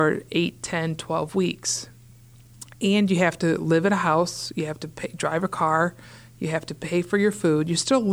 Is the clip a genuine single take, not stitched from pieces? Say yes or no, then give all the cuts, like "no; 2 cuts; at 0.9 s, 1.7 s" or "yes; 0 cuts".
yes; 0 cuts